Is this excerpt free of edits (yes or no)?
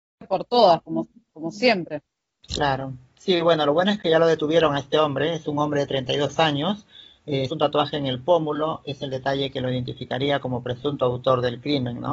no